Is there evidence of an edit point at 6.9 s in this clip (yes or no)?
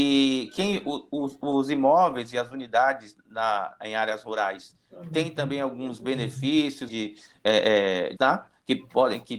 yes